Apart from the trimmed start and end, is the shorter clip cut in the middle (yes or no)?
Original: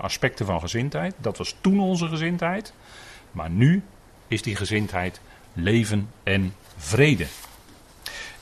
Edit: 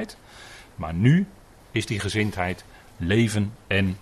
no